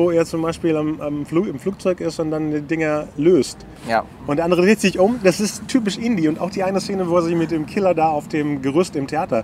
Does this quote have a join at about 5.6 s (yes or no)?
yes